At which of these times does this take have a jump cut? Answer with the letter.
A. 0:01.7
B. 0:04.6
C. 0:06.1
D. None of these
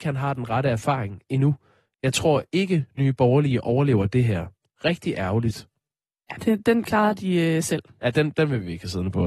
C